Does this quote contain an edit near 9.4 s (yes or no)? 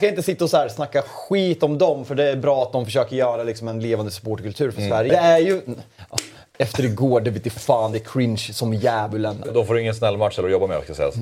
yes